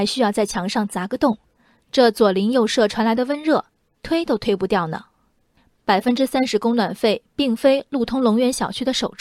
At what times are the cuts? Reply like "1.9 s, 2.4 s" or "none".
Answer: none